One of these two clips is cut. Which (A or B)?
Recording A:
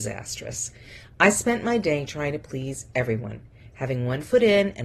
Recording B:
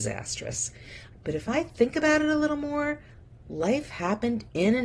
B